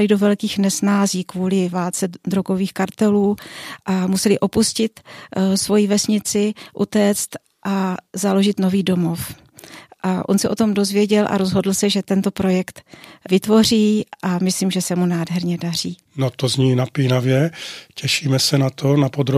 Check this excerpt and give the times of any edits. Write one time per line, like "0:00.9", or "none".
0:16.1